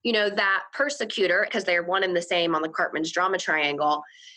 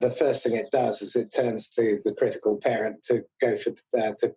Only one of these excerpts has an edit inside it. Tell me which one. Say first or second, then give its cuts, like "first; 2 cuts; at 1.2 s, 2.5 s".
first; 1 cut; at 1.5 s